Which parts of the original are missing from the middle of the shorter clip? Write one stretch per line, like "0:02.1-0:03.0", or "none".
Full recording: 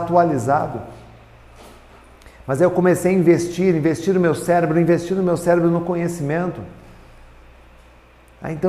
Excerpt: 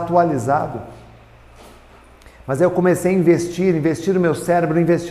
none